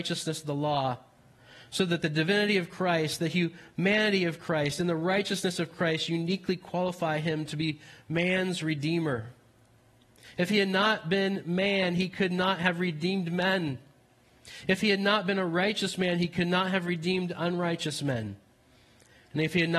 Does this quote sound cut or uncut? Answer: uncut